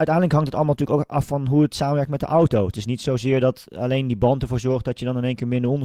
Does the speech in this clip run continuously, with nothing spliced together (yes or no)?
yes